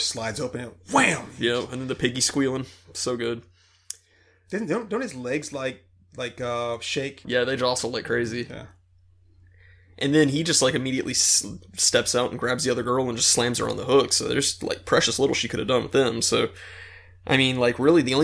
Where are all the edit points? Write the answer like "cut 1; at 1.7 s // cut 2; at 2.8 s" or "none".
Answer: cut 1; at 7.2 s